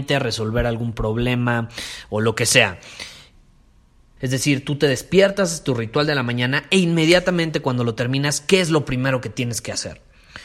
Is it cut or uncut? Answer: cut